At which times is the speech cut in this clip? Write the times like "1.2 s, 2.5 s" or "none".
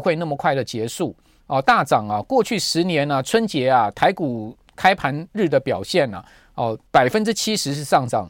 1.4 s, 6.9 s